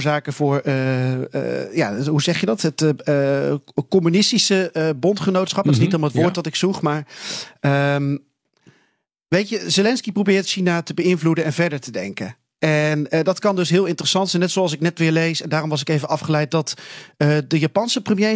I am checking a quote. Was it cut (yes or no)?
no